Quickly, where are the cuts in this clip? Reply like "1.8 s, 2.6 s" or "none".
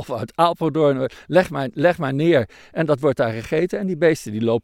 none